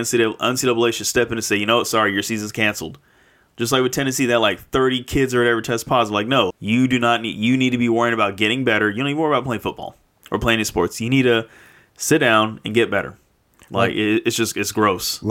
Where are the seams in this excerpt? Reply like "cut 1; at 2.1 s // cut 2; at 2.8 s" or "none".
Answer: cut 1; at 6.5 s